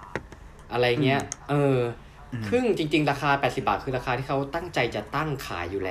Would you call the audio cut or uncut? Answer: uncut